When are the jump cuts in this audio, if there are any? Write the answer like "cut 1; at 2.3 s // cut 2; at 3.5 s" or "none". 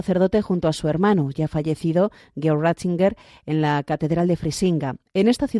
none